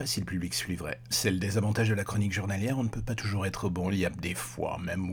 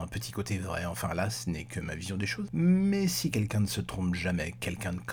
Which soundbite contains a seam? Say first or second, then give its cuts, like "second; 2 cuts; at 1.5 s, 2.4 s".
first; 1 cut; at 1.1 s